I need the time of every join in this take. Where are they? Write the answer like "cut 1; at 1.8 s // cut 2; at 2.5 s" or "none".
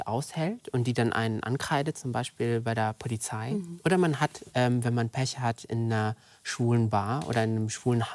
none